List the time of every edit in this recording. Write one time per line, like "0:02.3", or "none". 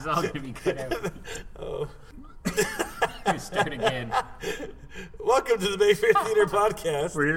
none